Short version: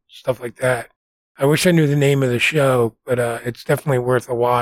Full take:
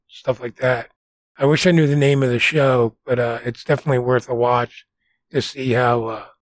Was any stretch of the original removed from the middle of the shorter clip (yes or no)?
no